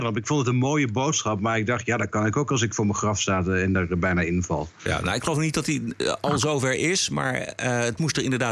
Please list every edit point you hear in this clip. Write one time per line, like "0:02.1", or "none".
none